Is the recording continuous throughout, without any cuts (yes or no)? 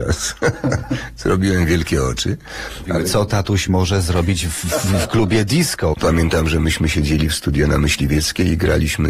no